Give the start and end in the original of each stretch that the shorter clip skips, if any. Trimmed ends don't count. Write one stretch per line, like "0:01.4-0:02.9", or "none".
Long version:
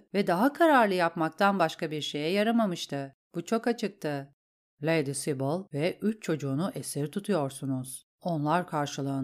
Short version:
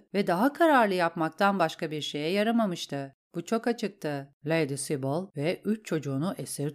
0:04.4-0:04.7